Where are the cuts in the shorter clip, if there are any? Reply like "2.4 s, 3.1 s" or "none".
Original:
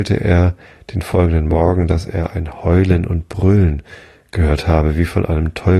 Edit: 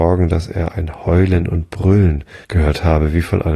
2.4 s